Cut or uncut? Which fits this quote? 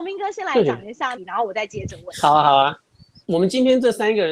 cut